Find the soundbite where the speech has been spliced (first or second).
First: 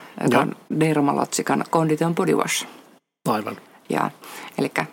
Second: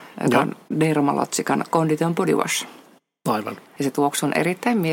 second